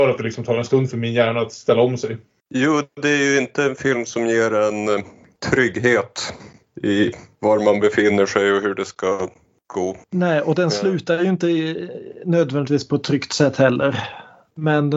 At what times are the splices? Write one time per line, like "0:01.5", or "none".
0:10.0